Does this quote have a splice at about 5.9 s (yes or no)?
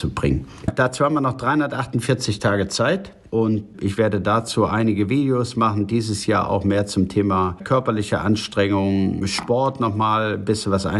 no